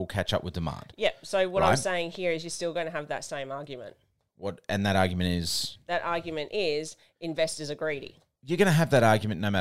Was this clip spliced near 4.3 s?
no; 0 cuts

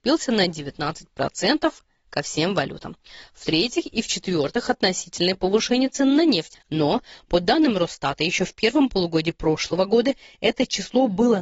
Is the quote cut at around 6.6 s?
yes; 1 cut; at 6.6 s

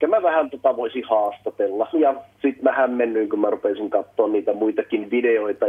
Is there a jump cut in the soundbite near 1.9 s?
yes; 1 cut; at 1.9 s

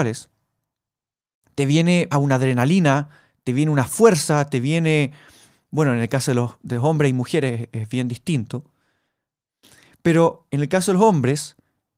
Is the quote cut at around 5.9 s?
no; 1 cut; at 2.1 s

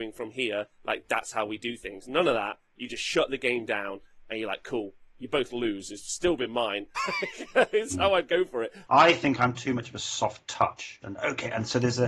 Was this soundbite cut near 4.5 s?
no; 3 cuts; at 7.0 s, 8.9 s, 11.0 s

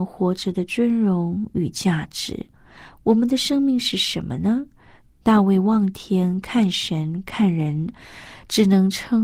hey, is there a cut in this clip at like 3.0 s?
yes; 2 cuts; at 3.0 s, 5.0 s

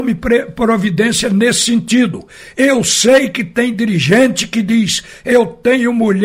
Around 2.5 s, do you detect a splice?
no; 0 cuts

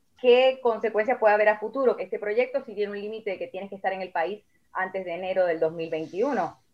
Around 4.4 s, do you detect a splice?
no; 1 cut; at 2.0 s

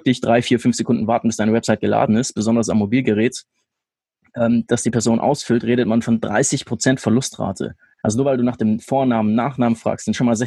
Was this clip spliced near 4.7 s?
yes; 1 cut; at 4.7 s

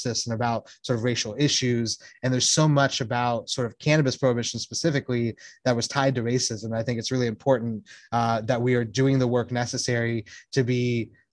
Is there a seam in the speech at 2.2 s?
no; 0 cuts

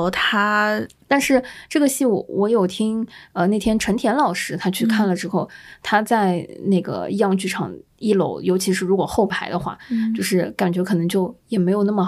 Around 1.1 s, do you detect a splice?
yes; 1 cut; at 1.1 s

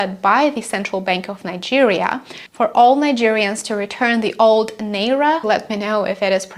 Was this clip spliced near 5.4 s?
yes; 1 cut; at 5.4 s

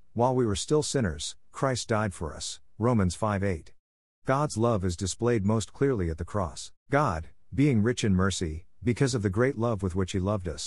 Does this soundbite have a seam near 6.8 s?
yes; 2 cuts; at 4.1 s, 6.8 s

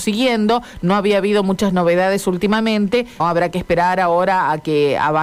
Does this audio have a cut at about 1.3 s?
no; 1 cut; at 3.2 s

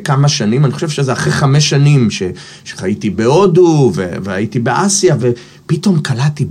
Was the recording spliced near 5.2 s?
yes; 1 cut; at 5.2 s

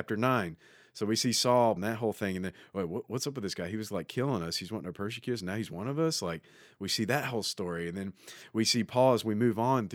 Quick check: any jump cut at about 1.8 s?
yes; 1 cut; at 1.8 s

